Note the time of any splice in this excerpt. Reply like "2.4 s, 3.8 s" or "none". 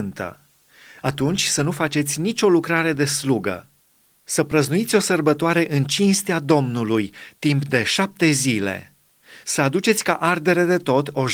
none